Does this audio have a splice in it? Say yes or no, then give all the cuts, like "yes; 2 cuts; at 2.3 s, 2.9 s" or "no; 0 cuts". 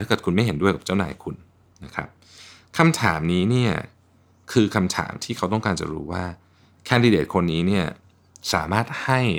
no; 0 cuts